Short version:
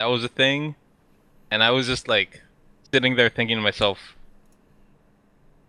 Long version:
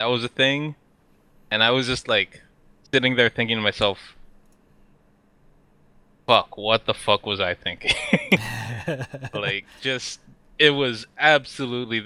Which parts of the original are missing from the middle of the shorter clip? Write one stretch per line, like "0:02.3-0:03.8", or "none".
none

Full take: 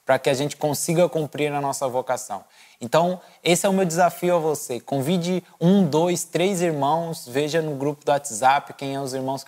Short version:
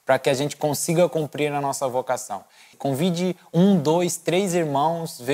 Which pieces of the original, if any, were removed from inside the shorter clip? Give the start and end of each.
0:02.7-0:04.8

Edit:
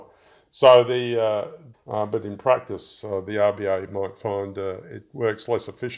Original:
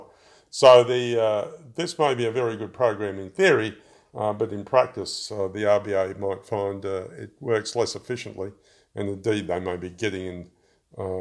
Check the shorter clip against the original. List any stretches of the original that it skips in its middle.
0:01.7-0:04.0

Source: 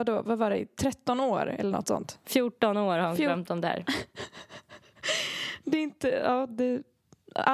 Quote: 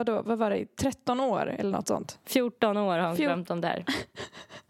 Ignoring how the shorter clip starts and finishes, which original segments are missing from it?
none

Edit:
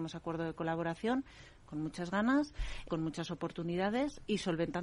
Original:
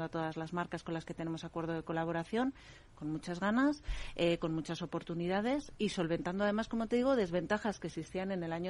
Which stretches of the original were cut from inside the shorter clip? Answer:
0:04.2-0:04.4

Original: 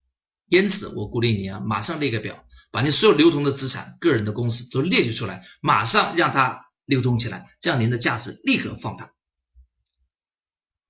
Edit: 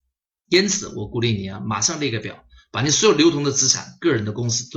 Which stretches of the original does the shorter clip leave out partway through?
none

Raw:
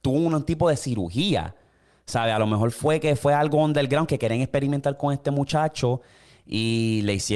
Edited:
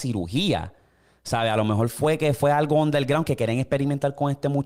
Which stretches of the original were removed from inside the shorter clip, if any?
none

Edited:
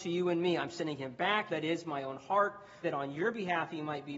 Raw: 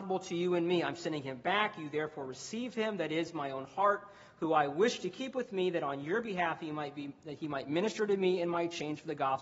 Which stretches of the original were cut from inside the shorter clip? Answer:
0:01.8-0:03.0
0:04.3-0:05.7

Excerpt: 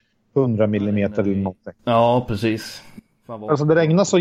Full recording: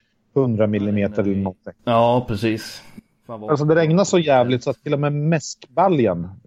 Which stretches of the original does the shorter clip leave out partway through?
none

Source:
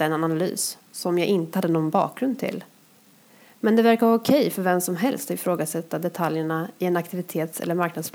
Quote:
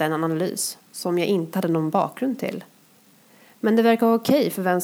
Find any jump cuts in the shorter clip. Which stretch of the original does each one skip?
none

